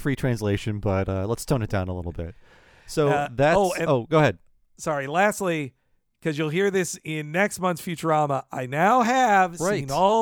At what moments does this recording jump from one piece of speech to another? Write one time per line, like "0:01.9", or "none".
none